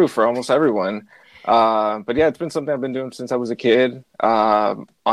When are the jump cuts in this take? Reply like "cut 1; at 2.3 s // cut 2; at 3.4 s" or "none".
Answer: none